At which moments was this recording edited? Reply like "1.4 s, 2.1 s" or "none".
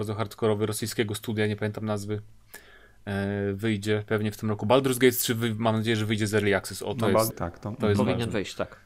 7.3 s